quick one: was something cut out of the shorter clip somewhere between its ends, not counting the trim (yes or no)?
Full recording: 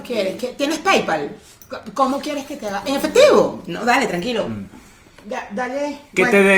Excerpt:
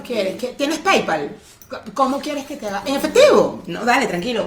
no